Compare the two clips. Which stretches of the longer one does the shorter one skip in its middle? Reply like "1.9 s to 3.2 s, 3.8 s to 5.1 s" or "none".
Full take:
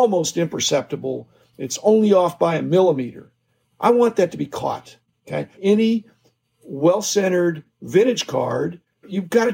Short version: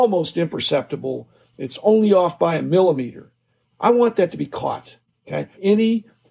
none